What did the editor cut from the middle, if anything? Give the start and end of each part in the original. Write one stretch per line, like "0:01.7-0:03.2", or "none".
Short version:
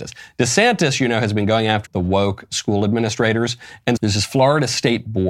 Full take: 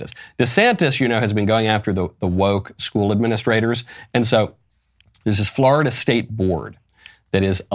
0:01.9-0:02.1
0:04.2-0:05.2